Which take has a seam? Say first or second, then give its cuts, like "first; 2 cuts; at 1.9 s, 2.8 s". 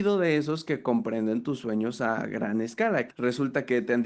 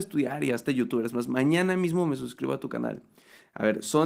first; 1 cut; at 3.1 s